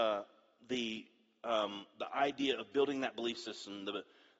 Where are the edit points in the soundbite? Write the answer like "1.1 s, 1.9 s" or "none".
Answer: none